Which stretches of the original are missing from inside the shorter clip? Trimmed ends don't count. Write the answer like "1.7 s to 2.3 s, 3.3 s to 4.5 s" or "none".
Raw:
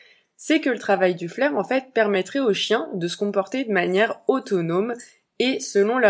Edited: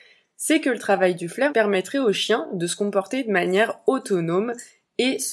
1.5 s to 1.9 s